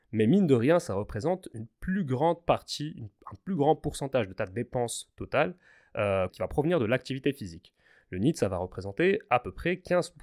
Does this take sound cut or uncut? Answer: cut